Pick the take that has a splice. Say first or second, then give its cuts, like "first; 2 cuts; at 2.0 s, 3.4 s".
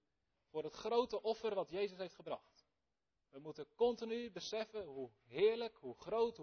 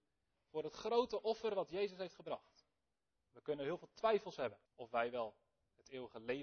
second; 2 cuts; at 3.1 s, 4.7 s